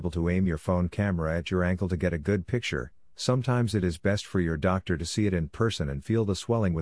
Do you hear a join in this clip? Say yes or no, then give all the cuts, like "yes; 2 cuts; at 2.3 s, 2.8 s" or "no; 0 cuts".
no; 0 cuts